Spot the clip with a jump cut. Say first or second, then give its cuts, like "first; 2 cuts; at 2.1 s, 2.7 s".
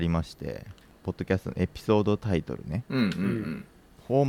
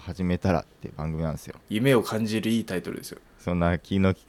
second; 2 cuts; at 1.6 s, 3.2 s